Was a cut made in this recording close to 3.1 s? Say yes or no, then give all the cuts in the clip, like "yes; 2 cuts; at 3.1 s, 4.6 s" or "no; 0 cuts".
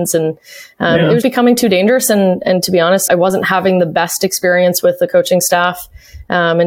yes; 2 cuts; at 1.2 s, 3.1 s